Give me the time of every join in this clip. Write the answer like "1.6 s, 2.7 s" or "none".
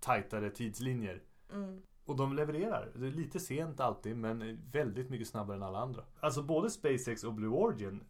6.2 s